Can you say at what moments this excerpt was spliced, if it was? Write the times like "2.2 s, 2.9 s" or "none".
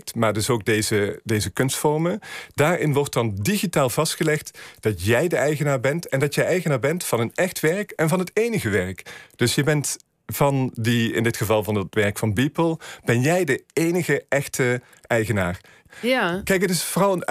15.9 s